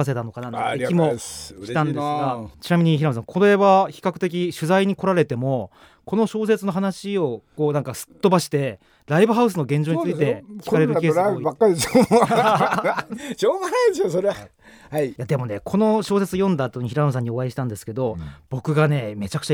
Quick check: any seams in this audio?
no; 0 cuts

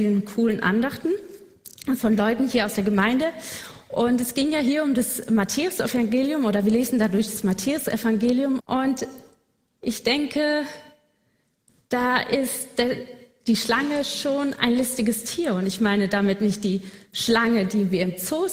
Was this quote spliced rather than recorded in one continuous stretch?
yes; 1 cut; at 8.6 s

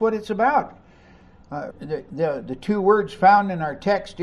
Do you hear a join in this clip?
yes; 1 cut; at 1.7 s

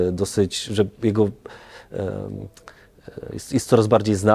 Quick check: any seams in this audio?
no; 0 cuts

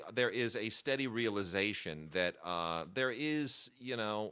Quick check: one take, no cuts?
yes; 0 cuts

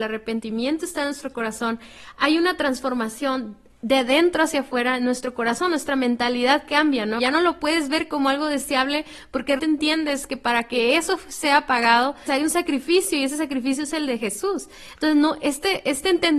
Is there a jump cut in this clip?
yes; 3 cuts; at 7.2 s, 9.6 s, 12.3 s

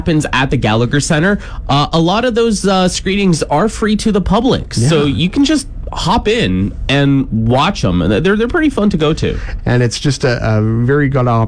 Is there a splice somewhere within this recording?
yes; 1 cut; at 9.6 s

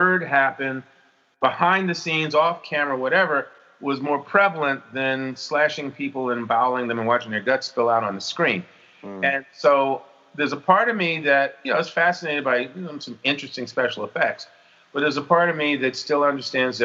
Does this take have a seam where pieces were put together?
no; 0 cuts

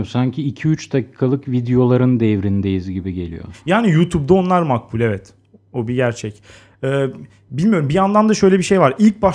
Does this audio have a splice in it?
no; 0 cuts

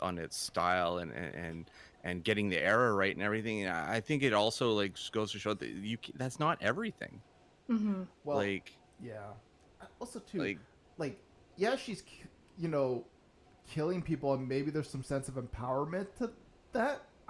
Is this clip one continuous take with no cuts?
yes; 0 cuts

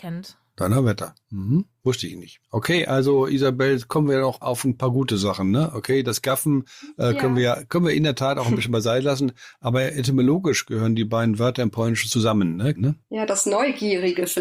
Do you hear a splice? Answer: yes; 1 cut; at 12.8 s

